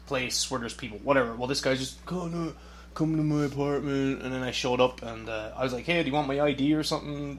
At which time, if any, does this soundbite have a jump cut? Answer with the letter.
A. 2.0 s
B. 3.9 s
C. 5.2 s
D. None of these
A